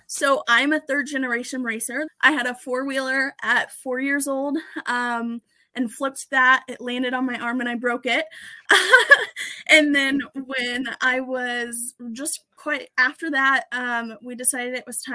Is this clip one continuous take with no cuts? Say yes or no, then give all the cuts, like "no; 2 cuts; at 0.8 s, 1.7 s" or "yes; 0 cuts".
no; 1 cut; at 2.1 s